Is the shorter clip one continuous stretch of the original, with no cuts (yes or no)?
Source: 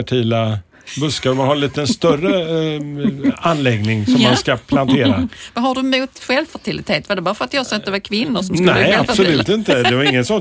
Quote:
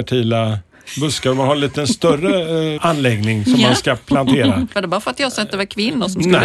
no